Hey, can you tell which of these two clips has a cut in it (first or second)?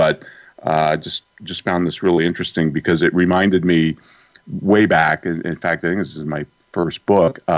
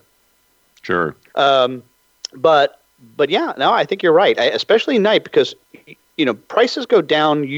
second